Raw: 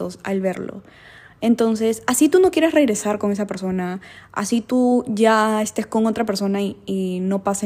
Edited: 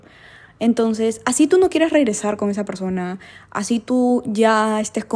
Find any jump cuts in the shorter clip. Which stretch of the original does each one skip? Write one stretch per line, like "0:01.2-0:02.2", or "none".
none